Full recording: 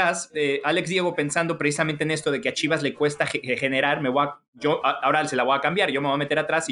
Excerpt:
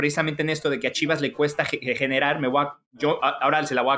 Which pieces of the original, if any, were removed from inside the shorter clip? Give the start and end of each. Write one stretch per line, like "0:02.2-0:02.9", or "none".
none